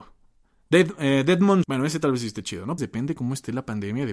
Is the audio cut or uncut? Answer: cut